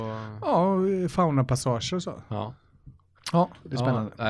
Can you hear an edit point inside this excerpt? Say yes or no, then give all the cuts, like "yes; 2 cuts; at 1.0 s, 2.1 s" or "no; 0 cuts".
yes; 1 cut; at 3.2 s